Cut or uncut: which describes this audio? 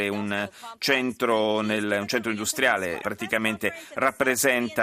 cut